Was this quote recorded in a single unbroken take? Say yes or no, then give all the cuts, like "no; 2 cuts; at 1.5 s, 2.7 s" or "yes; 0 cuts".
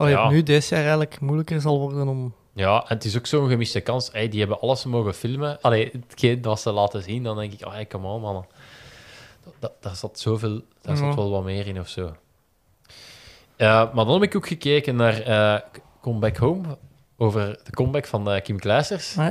no; 1 cut; at 5.6 s